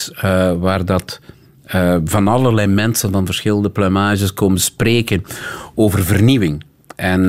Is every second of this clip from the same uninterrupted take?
yes; 0 cuts

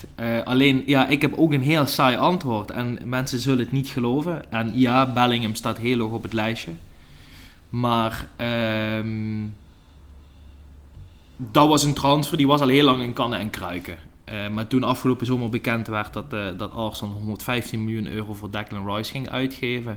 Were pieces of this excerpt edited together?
no; 0 cuts

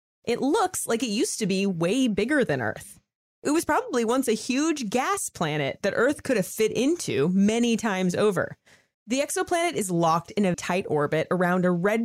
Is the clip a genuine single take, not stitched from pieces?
no; 2 cuts; at 8.9 s, 10.5 s

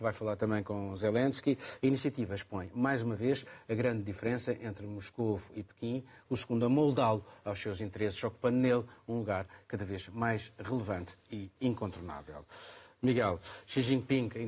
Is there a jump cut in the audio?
yes; 2 cuts; at 1.8 s, 6.3 s

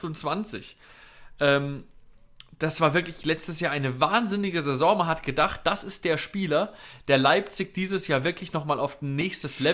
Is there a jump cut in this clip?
no; 0 cuts

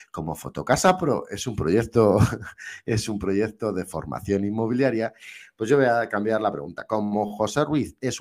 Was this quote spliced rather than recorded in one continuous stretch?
no; 0 cuts

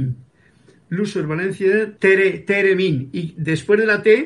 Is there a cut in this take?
yes; 1 cut; at 2.0 s

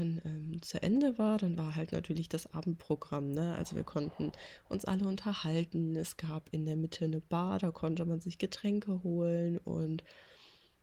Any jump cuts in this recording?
no; 0 cuts

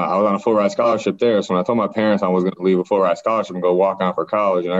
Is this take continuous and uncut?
yes; 0 cuts

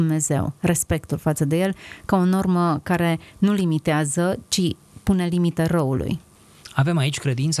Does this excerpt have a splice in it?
no; 0 cuts

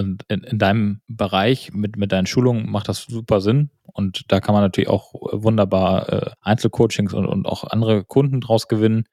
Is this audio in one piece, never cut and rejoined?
no; 1 cut; at 6.4 s

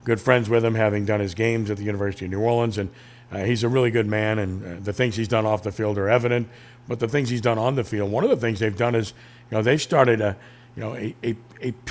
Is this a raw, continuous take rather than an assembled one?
yes; 0 cuts

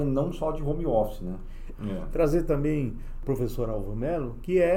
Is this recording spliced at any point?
yes; 1 cut; at 1.7 s

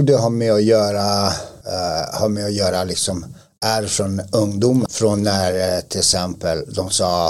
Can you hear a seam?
yes; 2 cuts; at 1.6 s, 4.9 s

